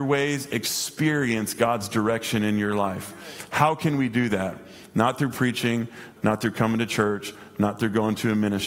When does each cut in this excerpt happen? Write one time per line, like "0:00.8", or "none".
0:06.2